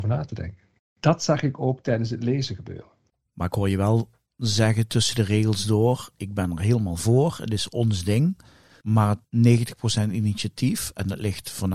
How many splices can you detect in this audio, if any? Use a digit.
0